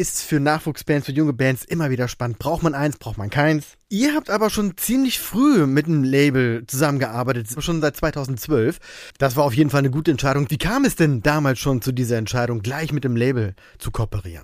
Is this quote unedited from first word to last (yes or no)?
no